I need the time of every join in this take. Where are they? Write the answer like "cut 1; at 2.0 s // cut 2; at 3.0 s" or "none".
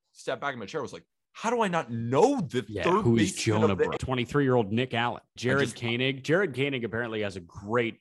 cut 1; at 4.0 s // cut 2; at 5.4 s